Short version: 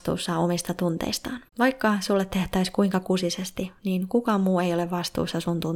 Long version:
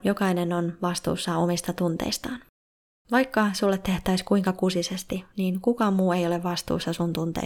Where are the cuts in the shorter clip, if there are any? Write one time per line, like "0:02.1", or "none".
0:01.5